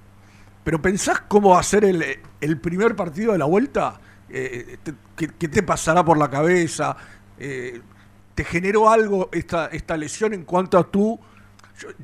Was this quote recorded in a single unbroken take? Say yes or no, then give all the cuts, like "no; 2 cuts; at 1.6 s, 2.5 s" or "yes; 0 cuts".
no; 1 cut; at 5.5 s